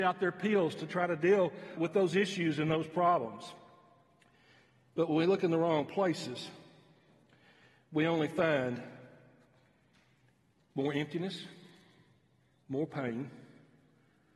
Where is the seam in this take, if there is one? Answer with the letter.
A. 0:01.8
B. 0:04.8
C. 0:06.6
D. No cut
A